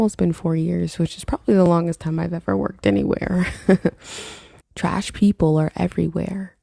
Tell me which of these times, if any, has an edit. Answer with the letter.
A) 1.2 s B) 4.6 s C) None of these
B